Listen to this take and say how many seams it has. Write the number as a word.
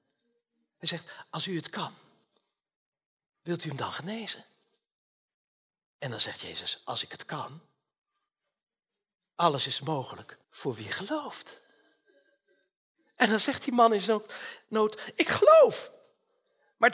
one